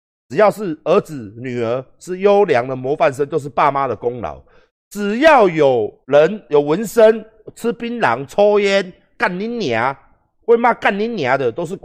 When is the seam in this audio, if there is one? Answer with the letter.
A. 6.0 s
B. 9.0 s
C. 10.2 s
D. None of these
A